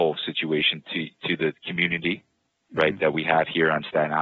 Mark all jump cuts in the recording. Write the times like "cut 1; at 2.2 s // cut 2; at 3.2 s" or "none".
none